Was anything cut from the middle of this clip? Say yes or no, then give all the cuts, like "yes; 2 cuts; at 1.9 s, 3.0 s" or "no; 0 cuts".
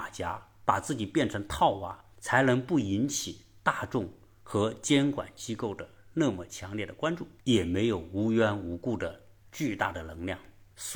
yes; 1 cut; at 7.4 s